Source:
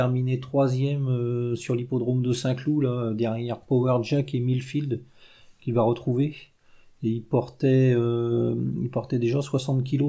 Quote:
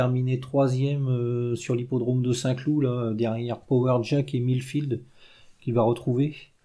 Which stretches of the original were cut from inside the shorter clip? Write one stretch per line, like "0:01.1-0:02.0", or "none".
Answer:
none